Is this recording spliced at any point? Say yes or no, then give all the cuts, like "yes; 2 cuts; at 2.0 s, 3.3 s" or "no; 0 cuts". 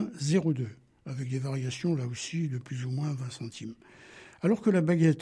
no; 0 cuts